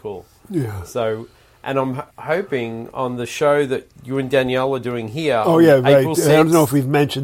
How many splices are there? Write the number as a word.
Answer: one